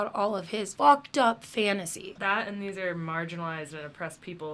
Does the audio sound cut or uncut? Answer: cut